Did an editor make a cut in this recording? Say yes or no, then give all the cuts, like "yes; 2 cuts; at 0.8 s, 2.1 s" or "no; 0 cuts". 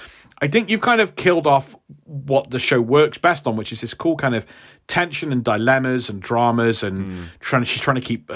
no; 0 cuts